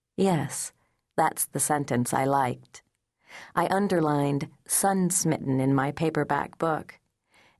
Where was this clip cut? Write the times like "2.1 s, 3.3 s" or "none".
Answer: none